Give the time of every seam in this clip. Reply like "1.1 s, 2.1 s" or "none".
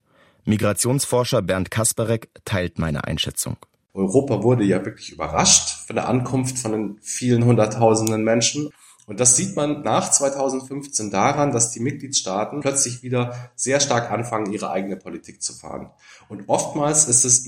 9.8 s